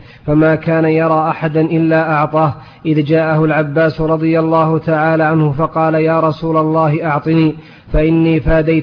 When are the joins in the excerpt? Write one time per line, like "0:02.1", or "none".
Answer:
none